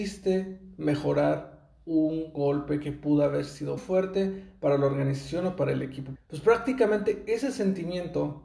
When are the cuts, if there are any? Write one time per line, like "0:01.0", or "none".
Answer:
0:03.8
0:06.1